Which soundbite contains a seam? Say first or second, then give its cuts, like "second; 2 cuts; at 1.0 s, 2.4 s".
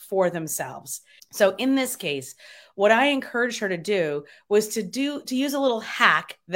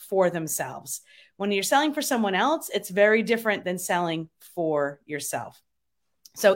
first; 1 cut; at 1.2 s